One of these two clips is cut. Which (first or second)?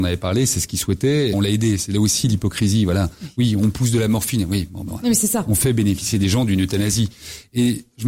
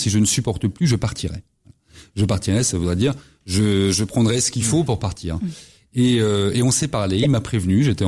first